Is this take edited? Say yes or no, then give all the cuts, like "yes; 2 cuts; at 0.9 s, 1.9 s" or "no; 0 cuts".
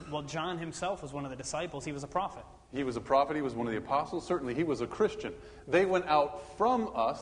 no; 0 cuts